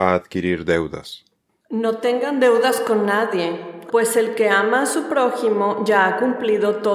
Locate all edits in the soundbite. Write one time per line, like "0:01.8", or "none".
0:03.9